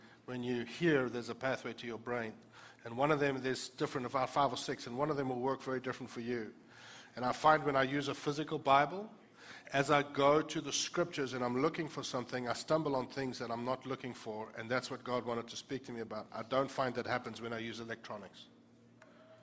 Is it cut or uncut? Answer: uncut